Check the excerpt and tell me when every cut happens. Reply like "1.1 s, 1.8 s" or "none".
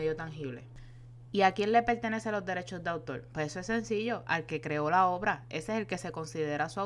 none

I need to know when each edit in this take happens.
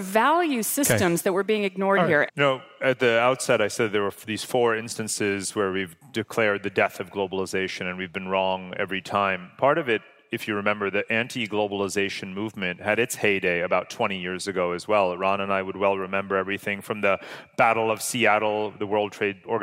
2.3 s

